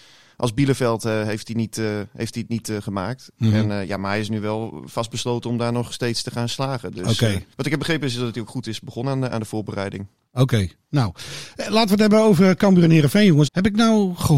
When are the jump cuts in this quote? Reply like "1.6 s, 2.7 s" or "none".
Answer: 7.5 s, 13.5 s